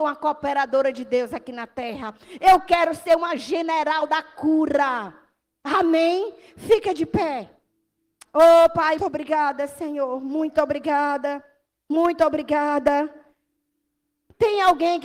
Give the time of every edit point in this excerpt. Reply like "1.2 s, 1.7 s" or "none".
9.0 s